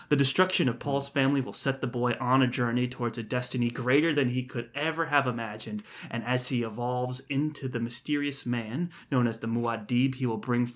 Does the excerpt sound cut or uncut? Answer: uncut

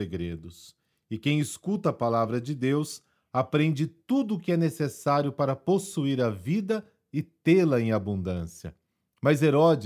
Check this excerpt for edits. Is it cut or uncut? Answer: uncut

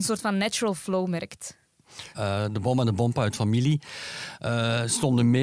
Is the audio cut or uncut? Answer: cut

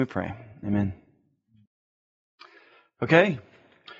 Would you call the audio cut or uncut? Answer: uncut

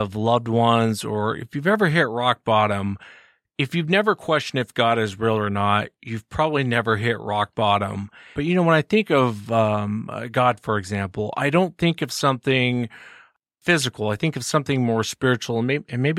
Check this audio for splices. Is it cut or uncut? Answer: cut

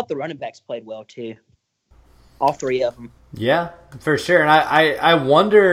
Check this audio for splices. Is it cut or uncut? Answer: uncut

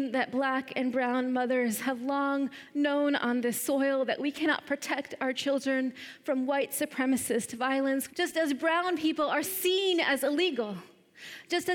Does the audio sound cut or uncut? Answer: cut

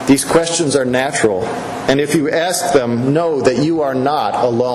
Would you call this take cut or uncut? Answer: uncut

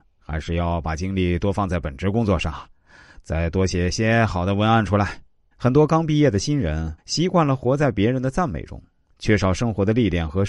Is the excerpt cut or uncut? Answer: cut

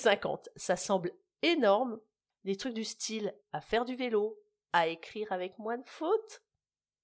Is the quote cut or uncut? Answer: cut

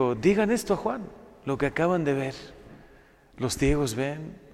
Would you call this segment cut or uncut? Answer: uncut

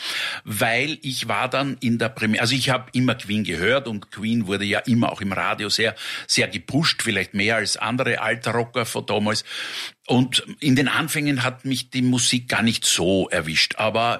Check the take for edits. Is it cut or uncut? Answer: uncut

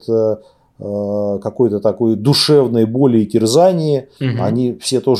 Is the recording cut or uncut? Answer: cut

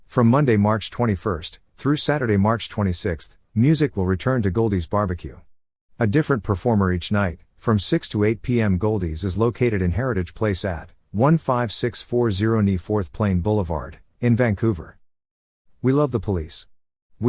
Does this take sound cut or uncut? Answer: uncut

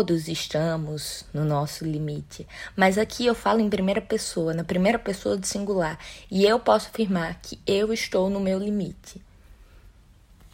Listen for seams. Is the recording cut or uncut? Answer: uncut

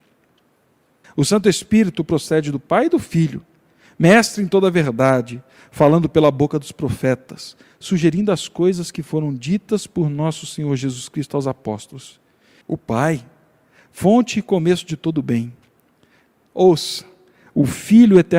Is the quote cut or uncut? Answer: cut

